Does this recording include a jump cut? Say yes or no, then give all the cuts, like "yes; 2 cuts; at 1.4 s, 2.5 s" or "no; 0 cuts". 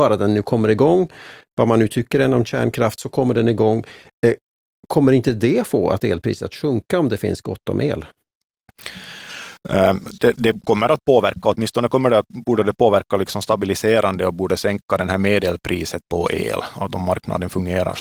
no; 0 cuts